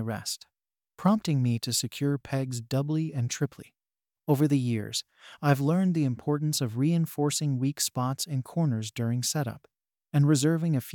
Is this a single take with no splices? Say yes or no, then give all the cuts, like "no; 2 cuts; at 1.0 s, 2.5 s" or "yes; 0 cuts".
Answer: yes; 0 cuts